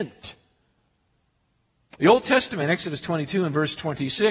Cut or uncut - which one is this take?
cut